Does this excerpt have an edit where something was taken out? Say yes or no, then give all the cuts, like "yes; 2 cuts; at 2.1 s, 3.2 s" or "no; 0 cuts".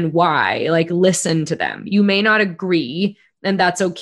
no; 0 cuts